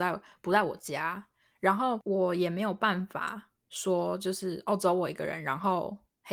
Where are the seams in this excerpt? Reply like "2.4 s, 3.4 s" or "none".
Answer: none